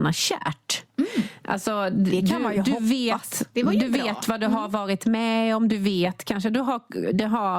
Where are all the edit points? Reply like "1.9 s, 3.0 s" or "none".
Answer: none